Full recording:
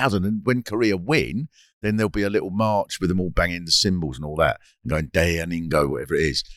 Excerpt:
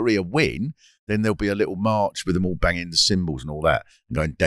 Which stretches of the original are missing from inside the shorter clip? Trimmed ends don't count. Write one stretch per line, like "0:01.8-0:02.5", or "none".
none